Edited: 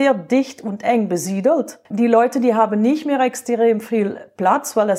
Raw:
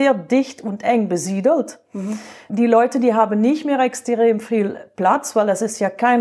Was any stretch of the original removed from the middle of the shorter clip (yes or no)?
yes